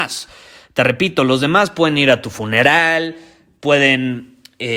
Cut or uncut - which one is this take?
uncut